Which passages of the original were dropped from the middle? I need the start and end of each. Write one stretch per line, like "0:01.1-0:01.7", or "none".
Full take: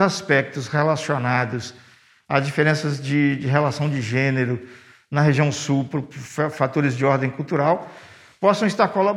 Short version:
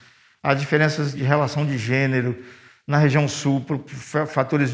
0:03.0-0:03.4